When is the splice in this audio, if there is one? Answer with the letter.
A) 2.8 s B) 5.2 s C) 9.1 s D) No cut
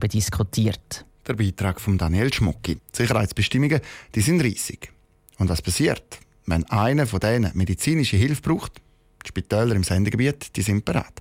A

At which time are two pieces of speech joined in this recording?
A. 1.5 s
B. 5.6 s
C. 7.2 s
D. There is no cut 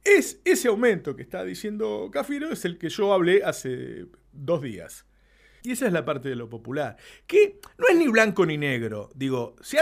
B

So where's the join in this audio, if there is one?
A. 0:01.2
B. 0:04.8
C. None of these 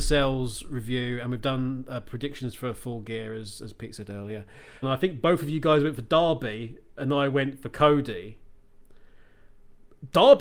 B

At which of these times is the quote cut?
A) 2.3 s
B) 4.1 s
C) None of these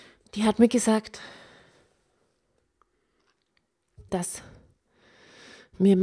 B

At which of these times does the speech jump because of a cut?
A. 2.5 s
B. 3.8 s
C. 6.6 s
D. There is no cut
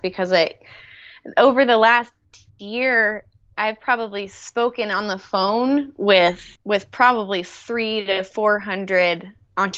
C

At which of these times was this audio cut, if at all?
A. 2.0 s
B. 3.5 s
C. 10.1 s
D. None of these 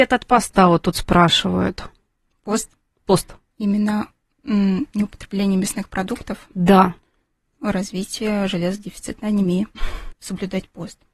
C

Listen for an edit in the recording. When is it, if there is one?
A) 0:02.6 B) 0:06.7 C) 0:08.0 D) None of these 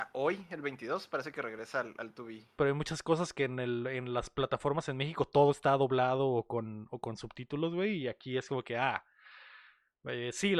A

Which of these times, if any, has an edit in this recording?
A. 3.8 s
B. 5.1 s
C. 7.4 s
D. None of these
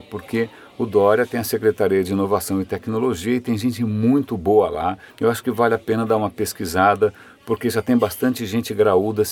B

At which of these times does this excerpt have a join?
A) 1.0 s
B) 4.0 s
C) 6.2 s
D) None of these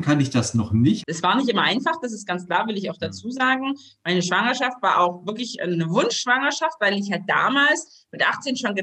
A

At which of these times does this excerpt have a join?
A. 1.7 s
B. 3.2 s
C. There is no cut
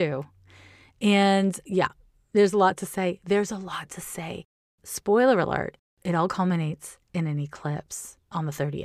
A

